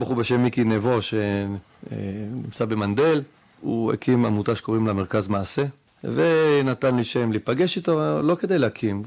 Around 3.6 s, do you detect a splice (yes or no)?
yes